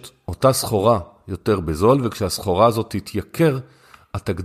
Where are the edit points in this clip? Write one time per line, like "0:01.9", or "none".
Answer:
none